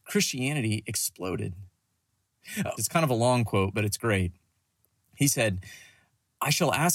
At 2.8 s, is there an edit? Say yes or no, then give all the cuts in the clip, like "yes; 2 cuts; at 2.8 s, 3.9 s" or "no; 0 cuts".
yes; 1 cut; at 2.8 s